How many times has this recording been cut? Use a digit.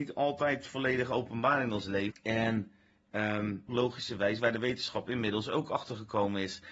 2